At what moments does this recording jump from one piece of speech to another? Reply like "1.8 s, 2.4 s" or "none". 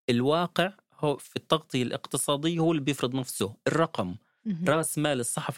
none